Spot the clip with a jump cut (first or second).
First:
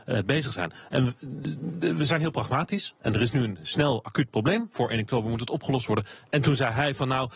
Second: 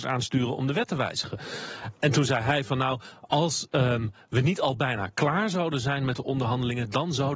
first